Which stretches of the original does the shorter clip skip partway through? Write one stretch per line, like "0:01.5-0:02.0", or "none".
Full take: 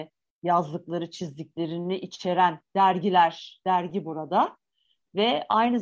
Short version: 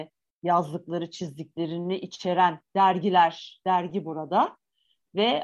none